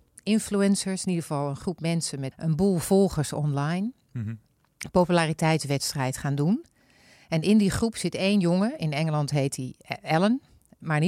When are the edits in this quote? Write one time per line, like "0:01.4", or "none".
0:02.3